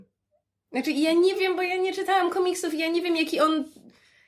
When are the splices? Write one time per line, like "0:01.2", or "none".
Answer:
none